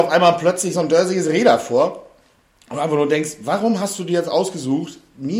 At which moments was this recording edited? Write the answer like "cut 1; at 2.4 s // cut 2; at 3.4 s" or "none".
none